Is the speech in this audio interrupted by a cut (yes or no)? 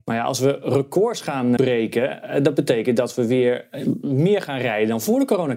yes